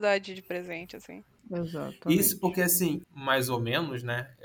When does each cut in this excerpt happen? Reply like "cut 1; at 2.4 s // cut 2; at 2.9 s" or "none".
cut 1; at 1.4 s // cut 2; at 3.0 s